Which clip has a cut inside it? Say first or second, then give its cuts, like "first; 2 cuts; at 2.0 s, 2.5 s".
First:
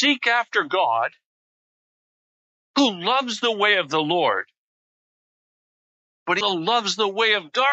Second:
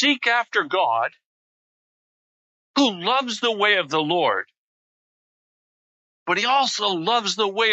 first; 1 cut; at 6.4 s